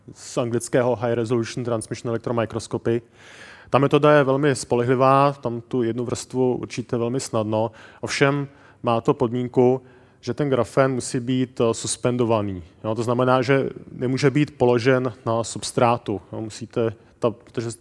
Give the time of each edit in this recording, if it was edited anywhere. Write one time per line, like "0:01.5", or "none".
none

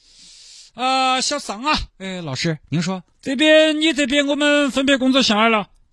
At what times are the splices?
0:01.9
0:03.1

